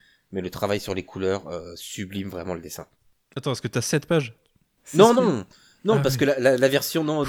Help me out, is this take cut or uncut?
cut